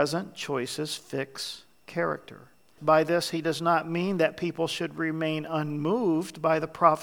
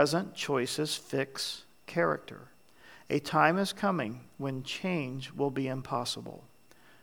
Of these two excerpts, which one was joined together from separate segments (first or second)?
first